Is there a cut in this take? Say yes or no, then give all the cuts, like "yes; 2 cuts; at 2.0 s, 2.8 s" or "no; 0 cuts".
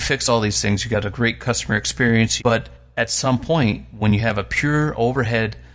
yes; 1 cut; at 2.4 s